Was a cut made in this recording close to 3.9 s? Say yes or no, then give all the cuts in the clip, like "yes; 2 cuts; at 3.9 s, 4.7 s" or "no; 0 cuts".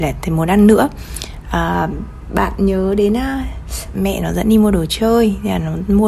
yes; 1 cut; at 3.9 s